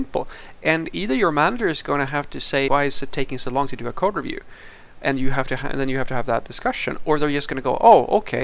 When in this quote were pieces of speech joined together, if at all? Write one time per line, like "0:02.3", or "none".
0:02.7